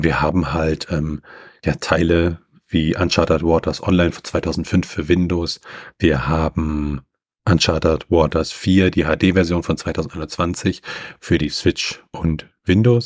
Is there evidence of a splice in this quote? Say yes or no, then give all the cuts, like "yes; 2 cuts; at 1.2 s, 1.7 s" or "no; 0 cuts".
no; 0 cuts